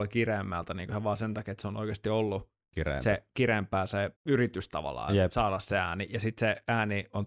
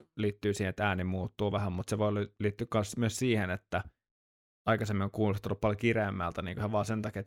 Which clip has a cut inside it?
first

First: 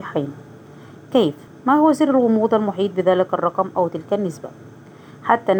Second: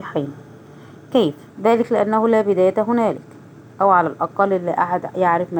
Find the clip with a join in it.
second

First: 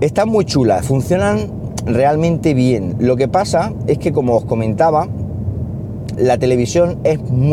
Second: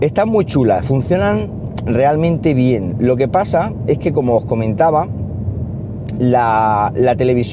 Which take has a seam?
first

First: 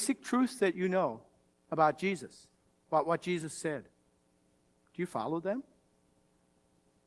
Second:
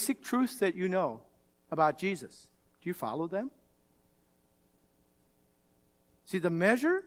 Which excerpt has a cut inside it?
second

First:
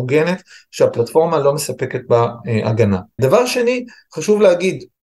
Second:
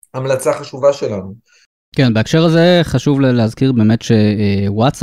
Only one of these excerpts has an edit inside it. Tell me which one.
first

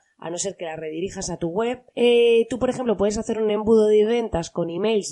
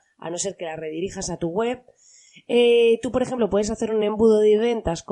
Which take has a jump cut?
first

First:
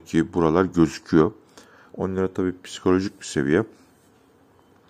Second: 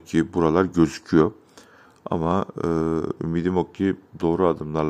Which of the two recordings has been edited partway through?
first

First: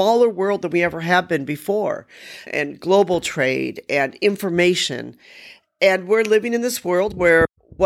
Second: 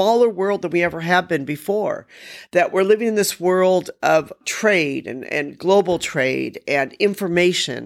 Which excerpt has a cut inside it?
first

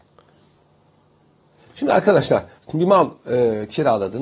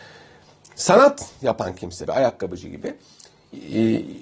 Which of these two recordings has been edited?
second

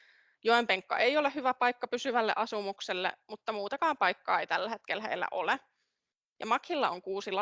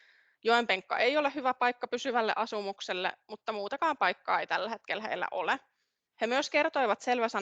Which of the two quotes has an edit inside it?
second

